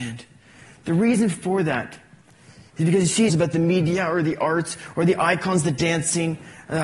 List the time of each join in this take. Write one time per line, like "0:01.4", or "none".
0:03.3